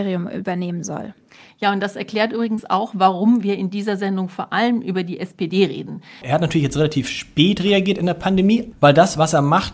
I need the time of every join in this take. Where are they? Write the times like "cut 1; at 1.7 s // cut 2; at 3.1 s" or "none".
cut 1; at 6.2 s // cut 2; at 8.7 s